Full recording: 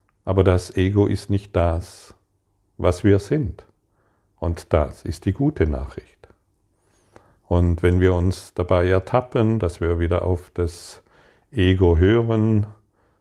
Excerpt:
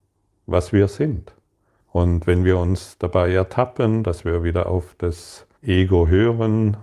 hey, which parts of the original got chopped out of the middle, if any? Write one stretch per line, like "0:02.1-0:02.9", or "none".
0:04.1-0:07.3
0:11.1-0:11.4